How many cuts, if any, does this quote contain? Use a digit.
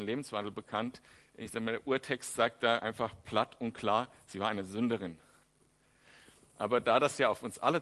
0